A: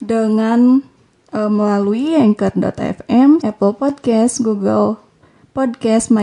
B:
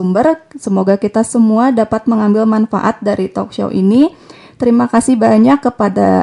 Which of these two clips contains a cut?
A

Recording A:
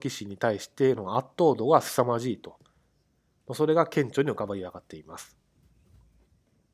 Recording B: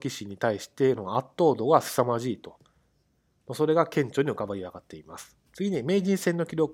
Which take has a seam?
B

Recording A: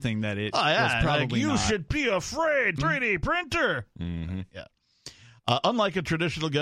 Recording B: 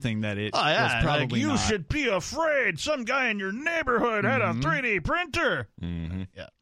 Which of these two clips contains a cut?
A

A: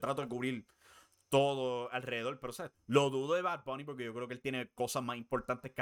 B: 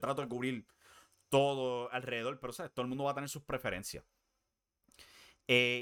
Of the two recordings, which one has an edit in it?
A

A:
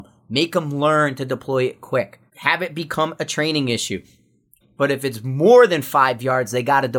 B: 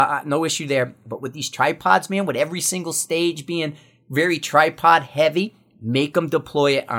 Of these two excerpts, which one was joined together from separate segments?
A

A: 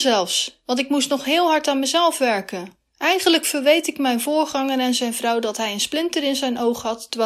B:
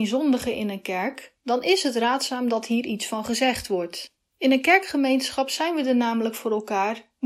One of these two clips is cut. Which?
B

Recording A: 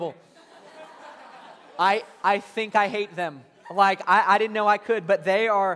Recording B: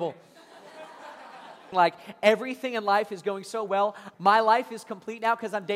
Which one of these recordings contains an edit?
B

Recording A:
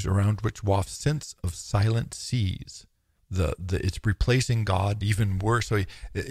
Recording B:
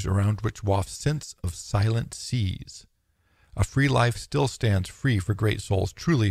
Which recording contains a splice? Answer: A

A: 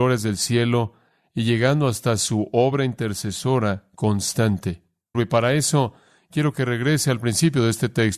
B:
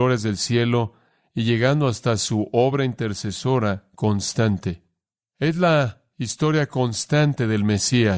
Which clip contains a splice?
A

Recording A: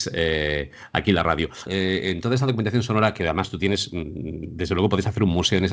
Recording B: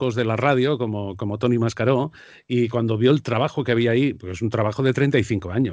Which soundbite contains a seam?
A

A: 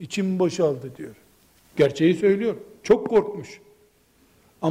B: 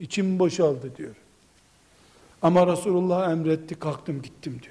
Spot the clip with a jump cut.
A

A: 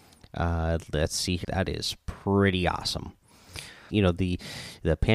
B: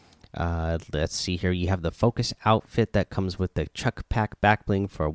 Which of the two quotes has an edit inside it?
A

